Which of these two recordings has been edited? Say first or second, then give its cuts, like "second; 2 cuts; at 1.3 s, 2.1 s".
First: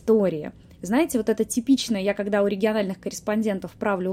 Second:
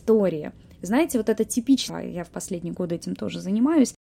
second; 1 cut; at 1.9 s